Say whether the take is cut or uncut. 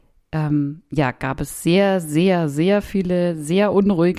uncut